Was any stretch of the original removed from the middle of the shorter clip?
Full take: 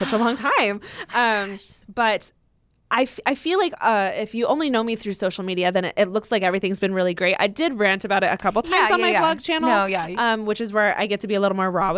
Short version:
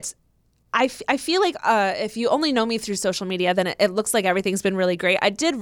no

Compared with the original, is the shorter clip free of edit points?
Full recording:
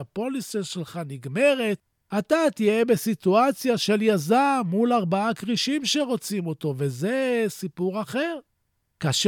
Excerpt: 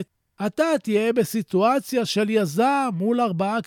yes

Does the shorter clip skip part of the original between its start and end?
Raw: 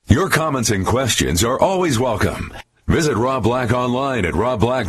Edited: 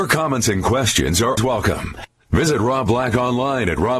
yes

